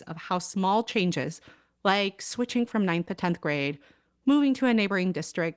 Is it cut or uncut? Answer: uncut